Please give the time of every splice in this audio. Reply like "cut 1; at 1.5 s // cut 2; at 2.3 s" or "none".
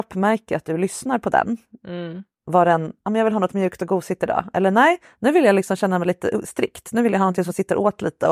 none